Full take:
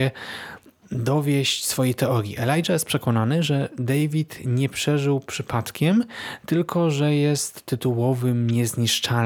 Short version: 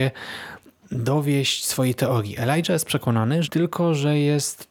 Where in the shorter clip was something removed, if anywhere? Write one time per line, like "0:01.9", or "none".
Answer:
0:03.4